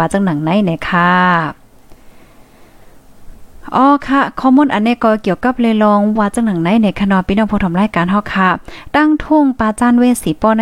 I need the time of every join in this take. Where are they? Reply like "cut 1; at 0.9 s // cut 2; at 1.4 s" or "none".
cut 1; at 6.2 s